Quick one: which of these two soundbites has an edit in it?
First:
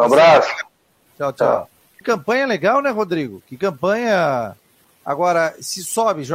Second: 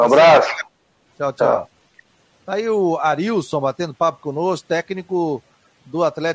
first; 2 cuts; at 2.0 s, 4.8 s

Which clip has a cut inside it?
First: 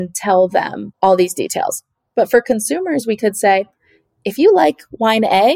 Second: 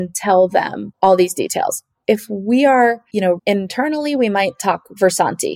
second; 2 cuts; at 2.0 s, 3.4 s

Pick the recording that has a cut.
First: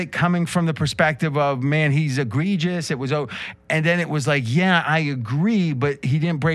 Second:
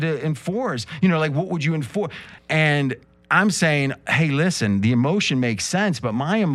second; 1 cut; at 2.4 s

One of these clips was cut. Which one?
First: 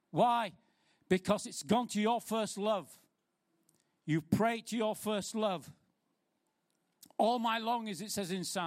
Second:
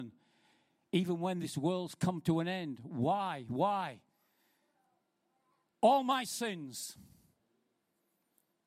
second; 1 cut; at 5.6 s

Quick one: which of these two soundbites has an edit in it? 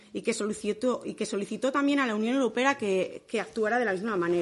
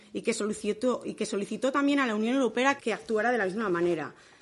second; 1 cut; at 2.8 s

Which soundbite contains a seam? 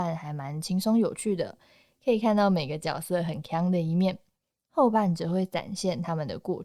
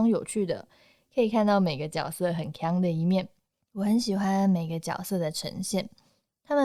second; 1 cut; at 3.6 s

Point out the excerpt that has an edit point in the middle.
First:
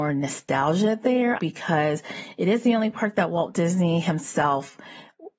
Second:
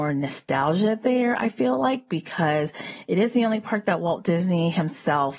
first; 1 cut; at 1.4 s

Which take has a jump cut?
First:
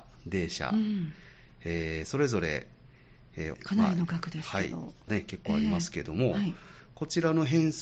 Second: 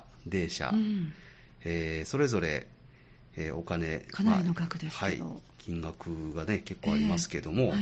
first; 2 cuts; at 3.5 s, 5.1 s

